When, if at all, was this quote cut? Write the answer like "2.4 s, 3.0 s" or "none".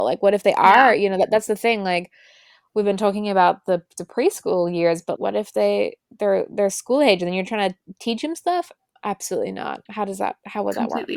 5.2 s